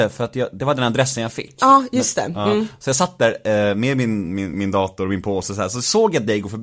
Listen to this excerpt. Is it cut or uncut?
uncut